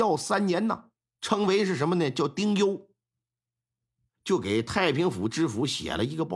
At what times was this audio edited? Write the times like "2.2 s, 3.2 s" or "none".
4.1 s